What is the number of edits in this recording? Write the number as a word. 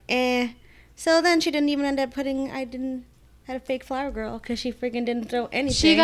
zero